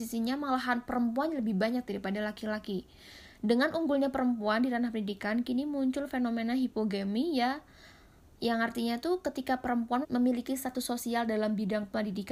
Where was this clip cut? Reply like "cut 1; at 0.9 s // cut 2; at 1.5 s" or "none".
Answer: cut 1; at 10.0 s